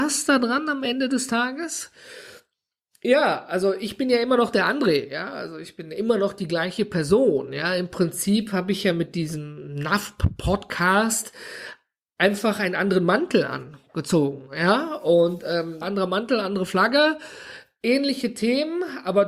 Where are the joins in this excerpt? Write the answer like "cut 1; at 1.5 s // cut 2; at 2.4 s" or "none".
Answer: cut 1; at 15.8 s